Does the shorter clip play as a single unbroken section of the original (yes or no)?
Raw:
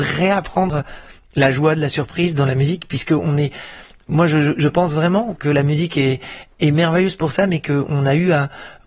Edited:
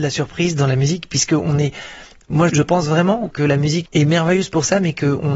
no